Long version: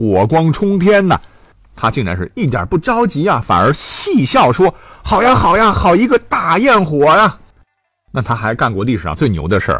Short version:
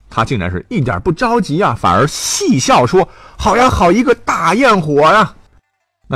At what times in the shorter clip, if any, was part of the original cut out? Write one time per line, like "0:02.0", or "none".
0:03.7

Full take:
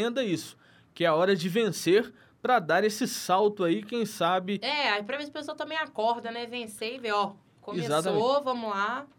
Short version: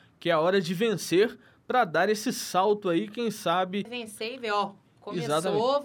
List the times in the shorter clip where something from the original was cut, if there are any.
0:03.8

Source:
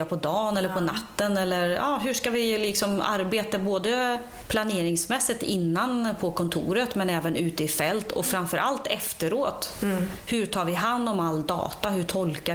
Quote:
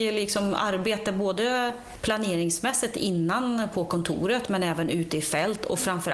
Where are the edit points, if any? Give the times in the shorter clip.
none

